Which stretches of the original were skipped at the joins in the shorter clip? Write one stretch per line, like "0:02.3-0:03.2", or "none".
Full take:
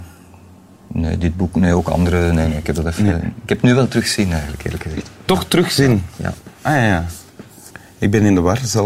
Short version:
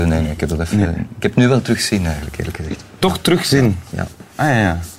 none